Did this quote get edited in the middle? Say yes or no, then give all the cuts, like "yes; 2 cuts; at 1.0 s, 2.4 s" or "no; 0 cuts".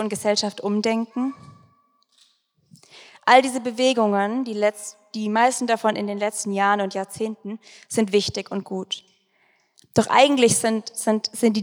no; 0 cuts